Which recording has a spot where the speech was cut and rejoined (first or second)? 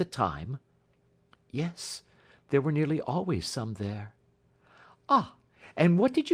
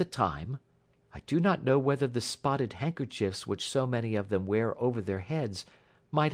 second